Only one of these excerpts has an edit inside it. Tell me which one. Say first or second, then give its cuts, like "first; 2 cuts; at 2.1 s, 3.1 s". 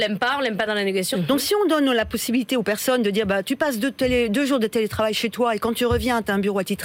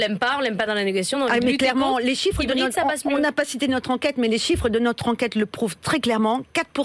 first; 1 cut; at 1.1 s